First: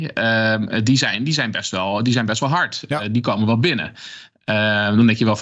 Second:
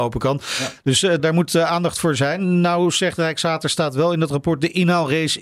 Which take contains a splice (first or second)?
second